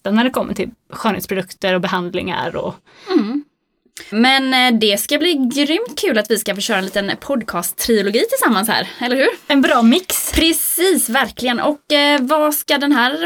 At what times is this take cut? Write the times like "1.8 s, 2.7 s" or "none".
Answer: 4.1 s